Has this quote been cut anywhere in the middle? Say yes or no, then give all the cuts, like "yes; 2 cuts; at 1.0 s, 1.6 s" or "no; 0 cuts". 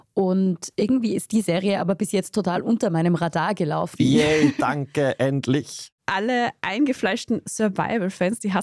yes; 1 cut; at 4.0 s